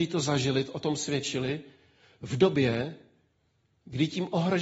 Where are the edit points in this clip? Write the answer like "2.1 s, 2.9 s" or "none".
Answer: none